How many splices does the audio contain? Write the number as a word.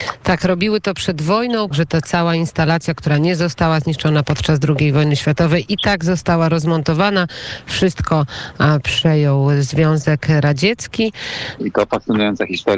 two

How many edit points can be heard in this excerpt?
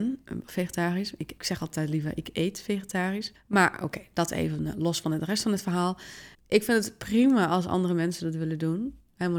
two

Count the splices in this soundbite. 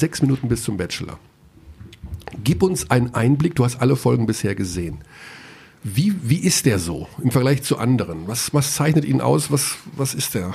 zero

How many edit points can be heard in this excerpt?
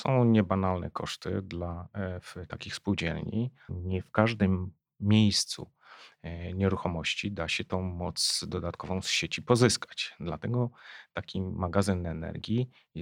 one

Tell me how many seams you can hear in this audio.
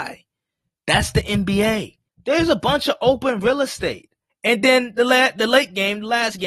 two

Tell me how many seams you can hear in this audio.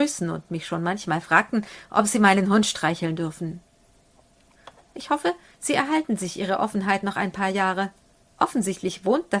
one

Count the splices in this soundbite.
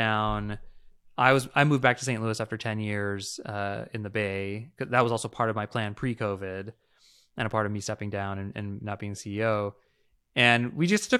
zero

